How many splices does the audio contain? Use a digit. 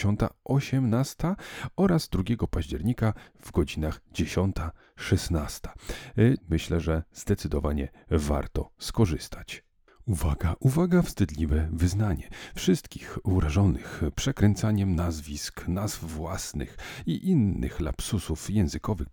1